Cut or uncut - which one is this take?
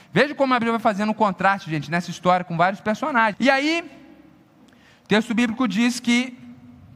cut